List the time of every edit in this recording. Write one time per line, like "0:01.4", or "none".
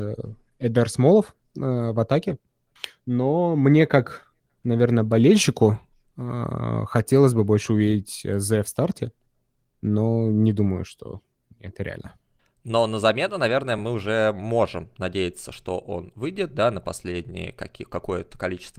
none